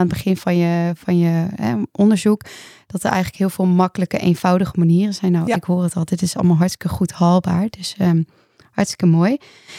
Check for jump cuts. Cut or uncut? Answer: uncut